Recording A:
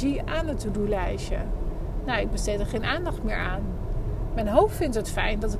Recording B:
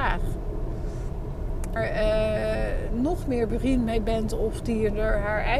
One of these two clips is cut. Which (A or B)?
B